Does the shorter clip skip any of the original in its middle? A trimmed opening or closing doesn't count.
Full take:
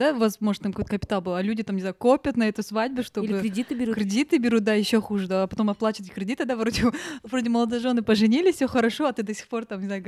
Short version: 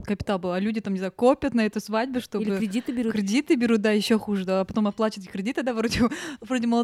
no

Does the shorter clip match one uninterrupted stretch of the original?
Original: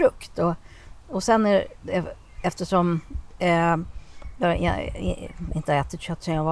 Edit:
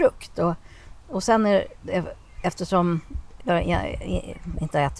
no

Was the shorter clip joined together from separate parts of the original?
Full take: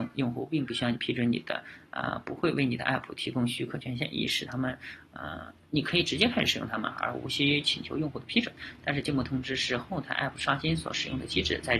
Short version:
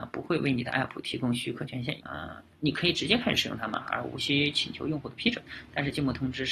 yes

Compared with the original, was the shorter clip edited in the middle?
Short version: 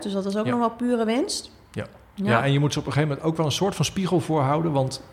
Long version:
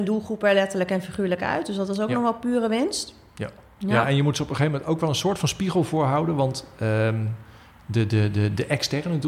no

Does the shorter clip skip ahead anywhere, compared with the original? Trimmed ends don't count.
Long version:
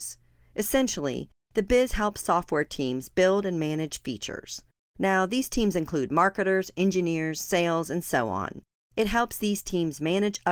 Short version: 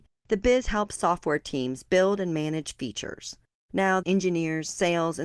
yes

